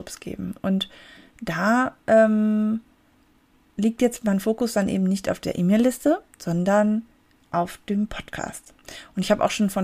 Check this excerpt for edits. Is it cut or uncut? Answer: uncut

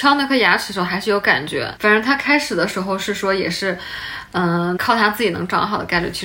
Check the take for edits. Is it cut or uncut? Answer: cut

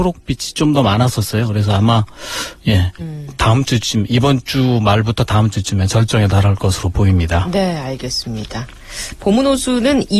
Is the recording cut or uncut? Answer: cut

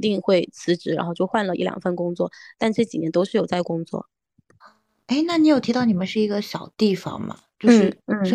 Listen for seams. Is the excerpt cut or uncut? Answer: uncut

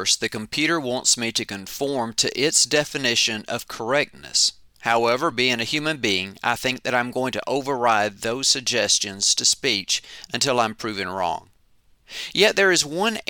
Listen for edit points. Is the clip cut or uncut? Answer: uncut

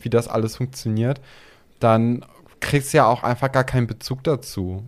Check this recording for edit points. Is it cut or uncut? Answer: uncut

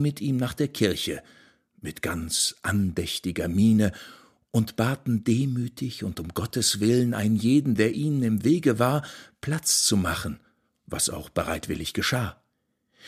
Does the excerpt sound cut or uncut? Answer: uncut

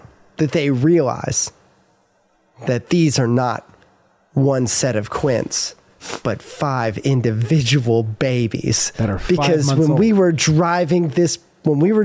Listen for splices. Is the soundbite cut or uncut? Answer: uncut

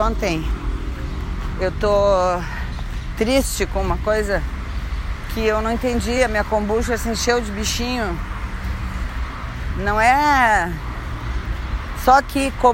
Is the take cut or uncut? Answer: uncut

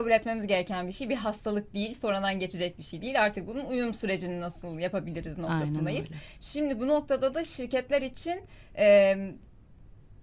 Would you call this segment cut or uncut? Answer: uncut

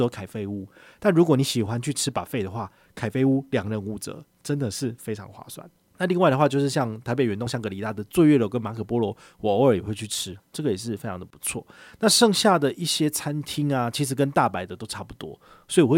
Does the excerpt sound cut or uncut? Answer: uncut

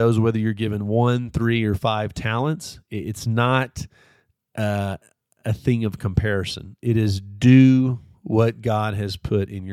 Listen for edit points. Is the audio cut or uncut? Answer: uncut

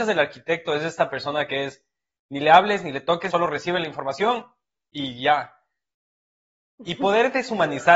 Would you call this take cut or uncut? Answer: cut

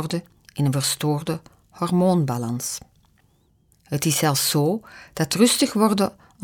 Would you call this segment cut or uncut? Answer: cut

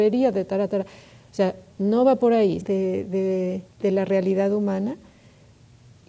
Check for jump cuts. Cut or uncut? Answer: cut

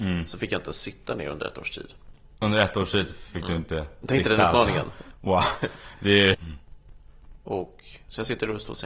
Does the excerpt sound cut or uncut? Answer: cut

